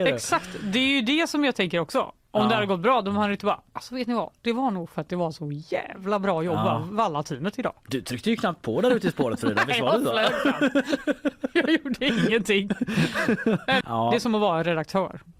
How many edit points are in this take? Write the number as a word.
one